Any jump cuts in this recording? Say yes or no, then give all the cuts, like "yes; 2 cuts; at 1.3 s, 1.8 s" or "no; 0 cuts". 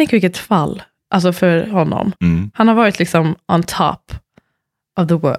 no; 0 cuts